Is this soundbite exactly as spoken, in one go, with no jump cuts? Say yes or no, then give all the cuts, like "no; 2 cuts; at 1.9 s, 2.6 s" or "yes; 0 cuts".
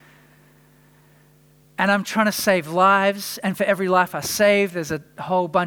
yes; 0 cuts